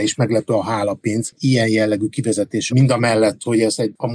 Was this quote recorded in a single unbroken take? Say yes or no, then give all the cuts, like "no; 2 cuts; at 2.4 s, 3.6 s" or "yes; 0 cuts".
no; 1 cut; at 2.7 s